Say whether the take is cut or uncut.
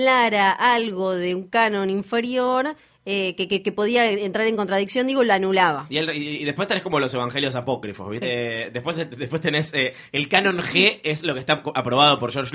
cut